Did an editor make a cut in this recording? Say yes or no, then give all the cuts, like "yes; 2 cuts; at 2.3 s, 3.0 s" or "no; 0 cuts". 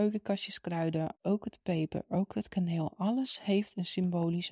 yes; 1 cut; at 1.2 s